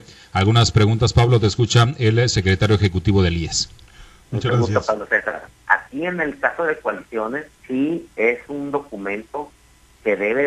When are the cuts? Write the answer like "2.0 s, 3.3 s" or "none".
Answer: 5.5 s, 7.5 s